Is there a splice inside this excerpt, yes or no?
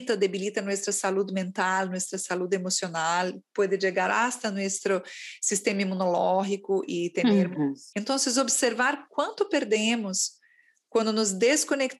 yes